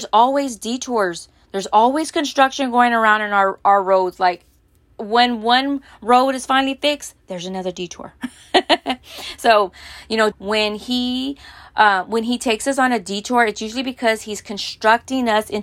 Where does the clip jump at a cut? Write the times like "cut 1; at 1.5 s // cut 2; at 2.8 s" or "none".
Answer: cut 1; at 10.3 s

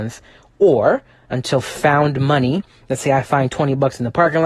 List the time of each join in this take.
none

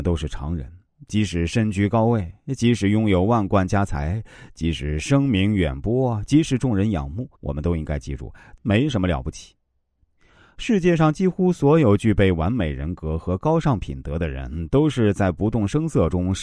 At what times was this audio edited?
cut 1; at 7.3 s // cut 2; at 8.6 s

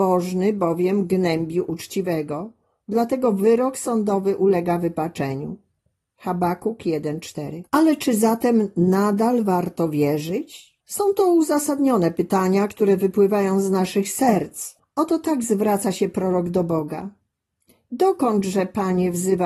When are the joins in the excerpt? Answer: cut 1; at 7.7 s // cut 2; at 10.8 s // cut 3; at 14.8 s

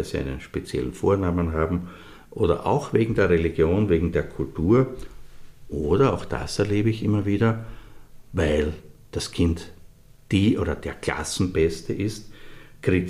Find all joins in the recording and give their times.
none

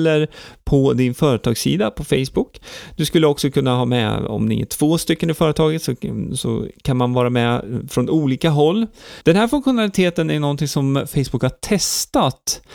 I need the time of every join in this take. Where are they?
cut 1; at 9.2 s

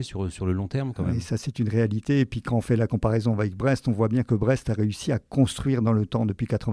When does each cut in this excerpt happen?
none

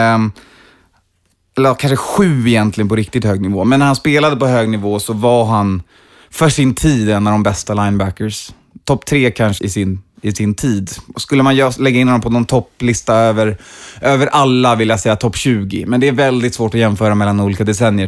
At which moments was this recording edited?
cut 1; at 9.6 s

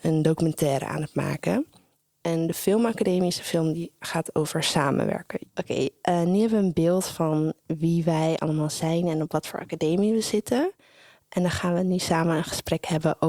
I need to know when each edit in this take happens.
cut 1; at 5.4 s

